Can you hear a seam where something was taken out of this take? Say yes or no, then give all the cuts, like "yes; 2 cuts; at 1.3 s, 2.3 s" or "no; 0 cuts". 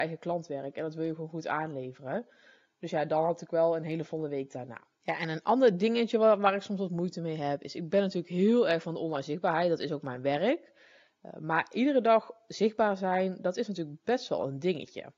no; 0 cuts